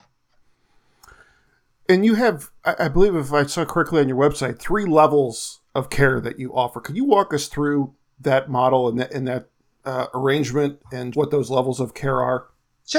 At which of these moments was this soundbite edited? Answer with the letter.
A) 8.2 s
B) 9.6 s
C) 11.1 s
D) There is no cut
C